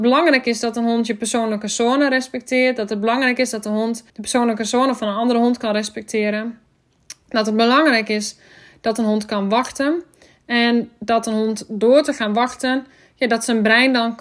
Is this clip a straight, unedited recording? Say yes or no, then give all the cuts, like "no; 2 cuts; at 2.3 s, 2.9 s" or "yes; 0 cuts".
no; 1 cut; at 4.1 s